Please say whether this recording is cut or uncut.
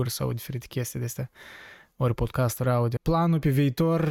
cut